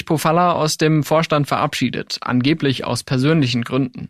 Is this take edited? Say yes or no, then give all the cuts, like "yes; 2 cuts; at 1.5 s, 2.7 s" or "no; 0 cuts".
no; 0 cuts